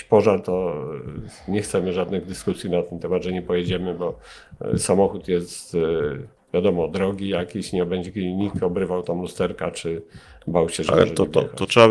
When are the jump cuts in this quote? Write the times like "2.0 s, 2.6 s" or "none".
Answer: none